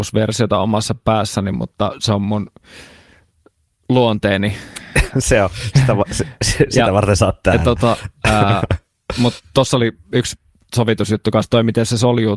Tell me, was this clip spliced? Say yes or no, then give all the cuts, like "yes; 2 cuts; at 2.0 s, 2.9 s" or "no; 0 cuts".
no; 0 cuts